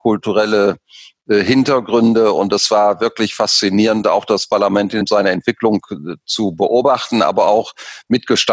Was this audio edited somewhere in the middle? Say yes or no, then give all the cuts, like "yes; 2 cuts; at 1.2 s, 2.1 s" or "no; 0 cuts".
no; 0 cuts